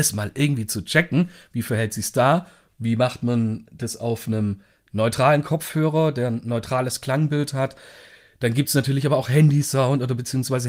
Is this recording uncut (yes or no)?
yes